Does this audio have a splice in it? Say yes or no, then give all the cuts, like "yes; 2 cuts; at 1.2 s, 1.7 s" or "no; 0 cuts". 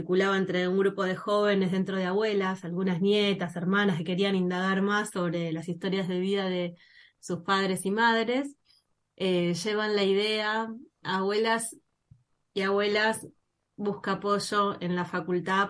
yes; 1 cut; at 11.0 s